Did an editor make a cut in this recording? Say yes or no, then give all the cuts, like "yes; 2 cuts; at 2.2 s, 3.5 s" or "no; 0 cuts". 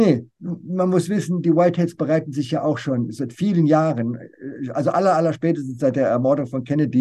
no; 0 cuts